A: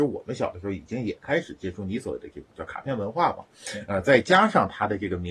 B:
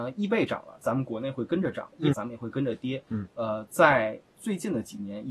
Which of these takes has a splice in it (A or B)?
B